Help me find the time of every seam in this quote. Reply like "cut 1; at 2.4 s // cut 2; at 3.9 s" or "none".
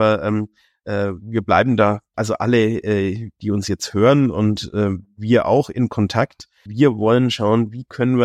cut 1; at 2.1 s // cut 2; at 6.7 s